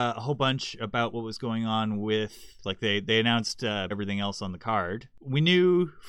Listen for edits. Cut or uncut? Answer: cut